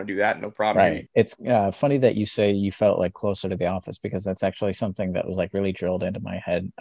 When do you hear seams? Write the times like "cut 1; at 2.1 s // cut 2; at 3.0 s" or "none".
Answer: cut 1; at 1.1 s